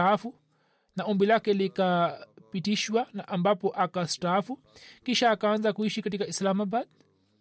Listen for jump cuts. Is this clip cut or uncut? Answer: uncut